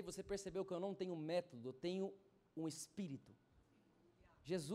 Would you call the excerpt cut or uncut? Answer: uncut